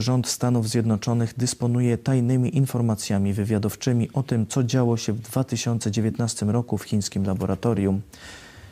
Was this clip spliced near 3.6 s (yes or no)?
no